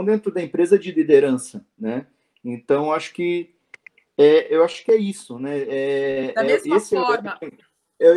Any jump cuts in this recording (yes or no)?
no